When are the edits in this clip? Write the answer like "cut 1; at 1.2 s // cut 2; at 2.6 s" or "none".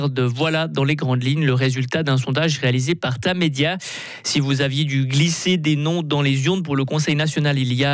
none